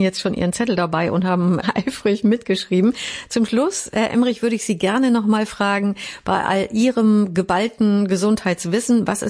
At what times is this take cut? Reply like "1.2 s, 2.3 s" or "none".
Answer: none